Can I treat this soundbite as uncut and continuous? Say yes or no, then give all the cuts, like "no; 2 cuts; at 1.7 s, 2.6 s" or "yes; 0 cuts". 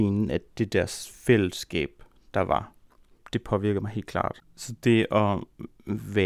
no; 1 cut; at 4.4 s